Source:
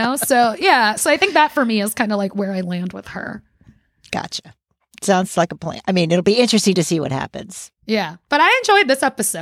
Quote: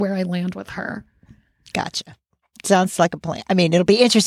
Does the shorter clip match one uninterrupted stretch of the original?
yes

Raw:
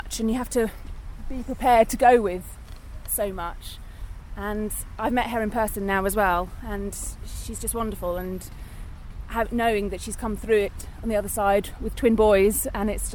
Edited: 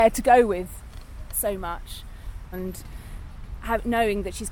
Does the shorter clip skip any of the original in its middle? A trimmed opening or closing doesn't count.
yes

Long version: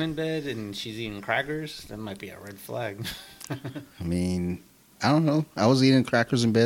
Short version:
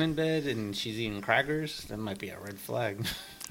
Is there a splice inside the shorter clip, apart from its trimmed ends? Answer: no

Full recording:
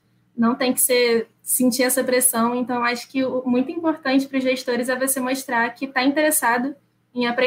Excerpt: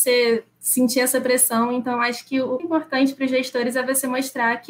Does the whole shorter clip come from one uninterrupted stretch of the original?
no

